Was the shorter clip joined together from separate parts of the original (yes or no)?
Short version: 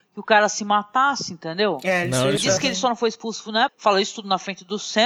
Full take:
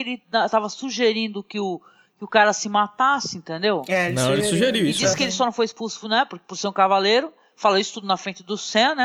yes